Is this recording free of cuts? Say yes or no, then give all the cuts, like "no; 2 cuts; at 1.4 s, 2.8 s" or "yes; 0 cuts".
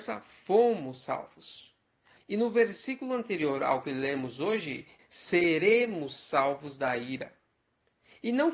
no; 2 cuts; at 2.2 s, 5.0 s